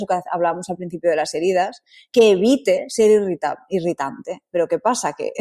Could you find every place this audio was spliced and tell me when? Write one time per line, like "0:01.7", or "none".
none